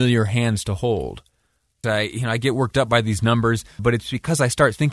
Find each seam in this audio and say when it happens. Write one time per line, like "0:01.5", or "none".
0:01.8
0:03.8